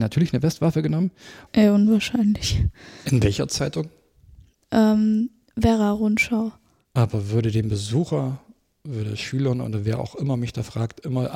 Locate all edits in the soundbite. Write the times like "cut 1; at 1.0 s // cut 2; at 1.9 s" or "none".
cut 1; at 1.5 s // cut 2; at 3.1 s // cut 3; at 6.8 s